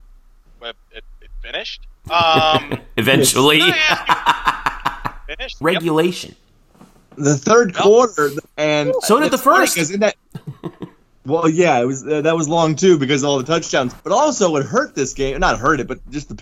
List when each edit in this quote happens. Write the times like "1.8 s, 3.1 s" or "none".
5.6 s, 8.5 s, 14.0 s